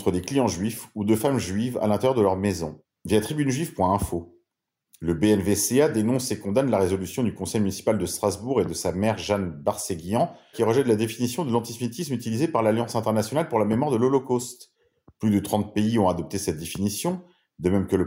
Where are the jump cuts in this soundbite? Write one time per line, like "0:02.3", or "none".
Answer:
0:02.9
0:10.5

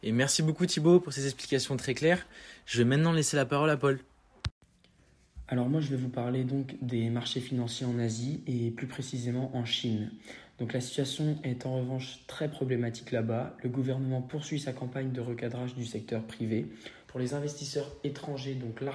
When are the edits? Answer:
0:17.0

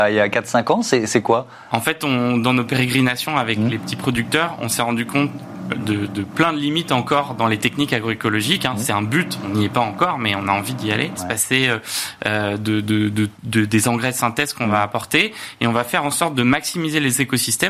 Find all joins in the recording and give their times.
0:11.2
0:13.3

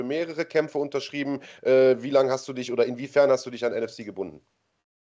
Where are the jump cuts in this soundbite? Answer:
none

